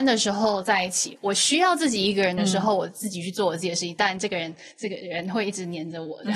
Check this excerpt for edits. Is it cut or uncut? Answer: uncut